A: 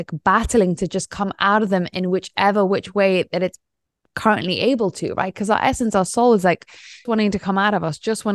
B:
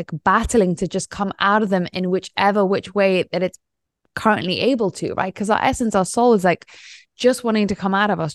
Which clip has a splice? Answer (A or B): A